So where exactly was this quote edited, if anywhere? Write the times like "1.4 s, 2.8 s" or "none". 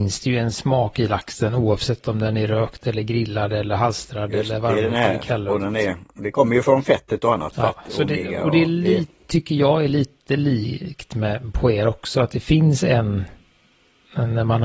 none